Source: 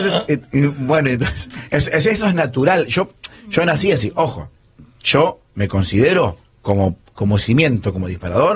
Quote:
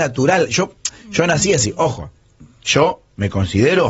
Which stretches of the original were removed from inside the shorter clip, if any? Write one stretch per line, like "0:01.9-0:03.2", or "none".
none

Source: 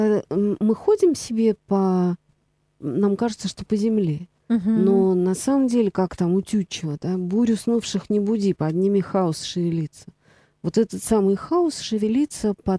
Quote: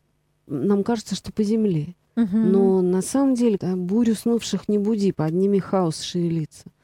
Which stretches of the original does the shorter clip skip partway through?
0:05.9-0:07.0

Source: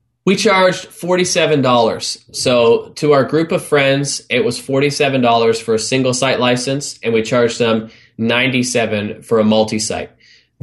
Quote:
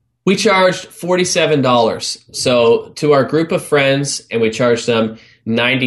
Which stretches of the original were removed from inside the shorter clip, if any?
0:04.3-0:07.0

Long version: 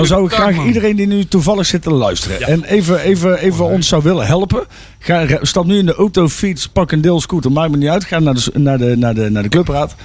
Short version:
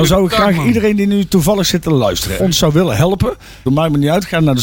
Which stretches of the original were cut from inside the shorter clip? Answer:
0:02.4-0:03.7
0:05.0-0:07.5

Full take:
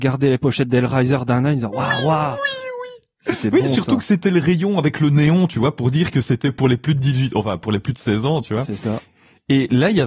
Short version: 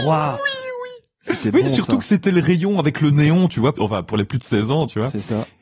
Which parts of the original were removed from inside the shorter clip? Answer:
0:05.7-0:07.3

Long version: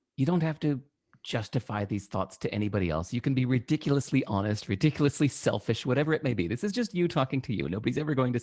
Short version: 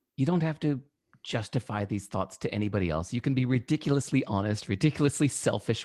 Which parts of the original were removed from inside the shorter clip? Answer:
none

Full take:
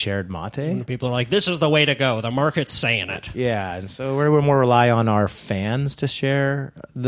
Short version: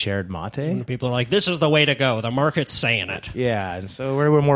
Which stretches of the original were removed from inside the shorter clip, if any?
none

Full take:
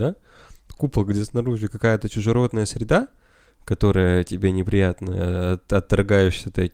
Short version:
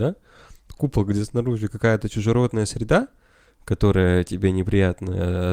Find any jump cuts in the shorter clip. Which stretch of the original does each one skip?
none

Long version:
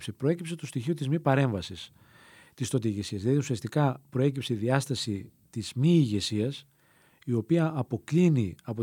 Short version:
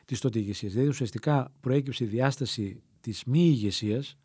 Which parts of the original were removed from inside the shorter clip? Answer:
none

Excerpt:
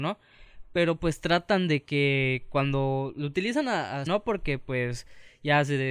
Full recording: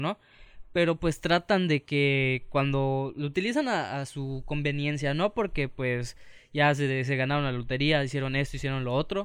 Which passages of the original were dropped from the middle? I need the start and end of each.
0:04.1-0:05.2

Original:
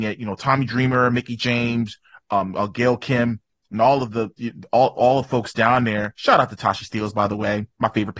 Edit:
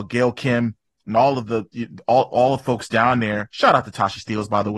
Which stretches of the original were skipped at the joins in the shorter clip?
none

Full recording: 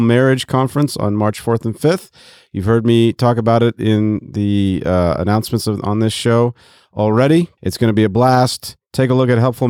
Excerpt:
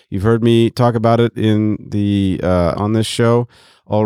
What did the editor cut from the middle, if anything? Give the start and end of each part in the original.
0:05.2-0:05.8

